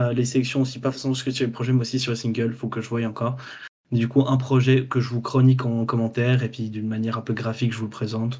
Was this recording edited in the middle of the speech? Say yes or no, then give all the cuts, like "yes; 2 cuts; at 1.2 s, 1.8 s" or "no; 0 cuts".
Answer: no; 0 cuts